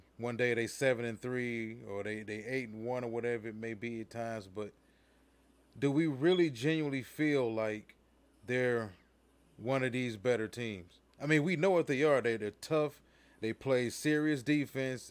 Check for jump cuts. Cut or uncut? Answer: uncut